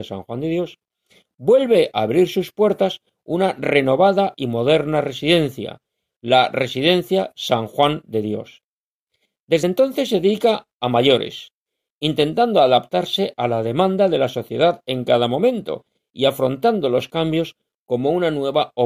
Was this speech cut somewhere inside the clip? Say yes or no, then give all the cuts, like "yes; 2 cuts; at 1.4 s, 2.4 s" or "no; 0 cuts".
no; 0 cuts